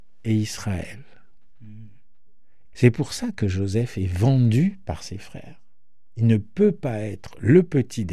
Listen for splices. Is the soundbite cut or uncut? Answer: cut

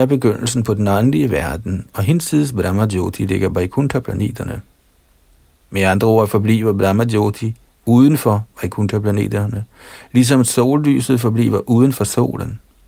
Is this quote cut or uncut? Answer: uncut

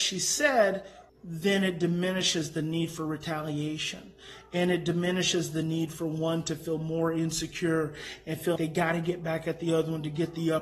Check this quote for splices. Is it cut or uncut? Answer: cut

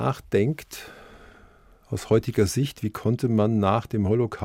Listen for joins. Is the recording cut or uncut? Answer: uncut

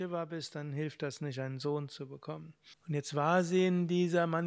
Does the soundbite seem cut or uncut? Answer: cut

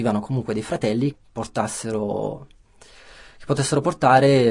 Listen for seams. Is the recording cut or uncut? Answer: cut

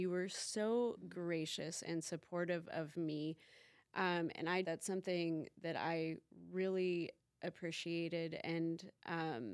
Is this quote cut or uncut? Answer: cut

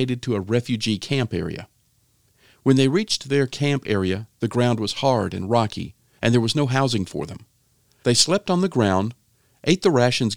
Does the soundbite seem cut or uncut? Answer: cut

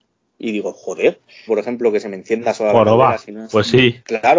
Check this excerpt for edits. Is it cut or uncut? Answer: cut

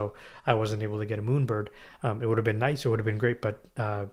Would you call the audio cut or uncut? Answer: uncut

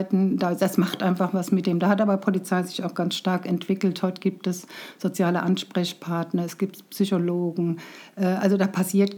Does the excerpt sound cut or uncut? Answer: uncut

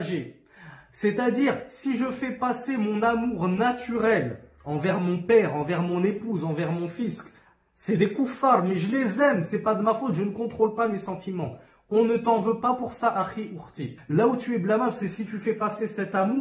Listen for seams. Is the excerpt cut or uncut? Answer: cut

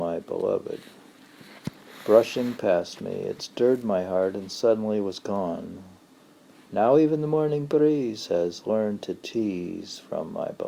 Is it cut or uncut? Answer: uncut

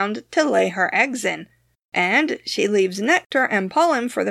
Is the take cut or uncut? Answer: cut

